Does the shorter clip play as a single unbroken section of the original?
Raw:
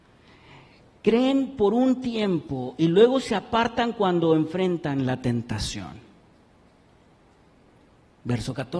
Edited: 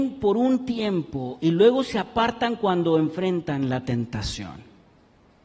yes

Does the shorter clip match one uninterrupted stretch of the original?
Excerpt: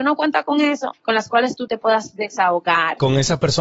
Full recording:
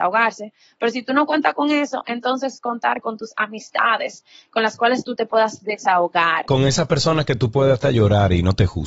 no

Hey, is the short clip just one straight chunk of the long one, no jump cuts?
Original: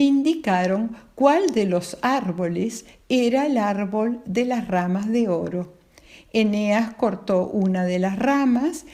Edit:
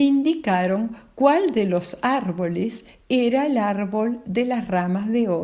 yes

